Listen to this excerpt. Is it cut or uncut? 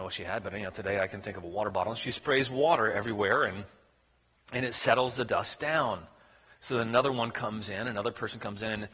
uncut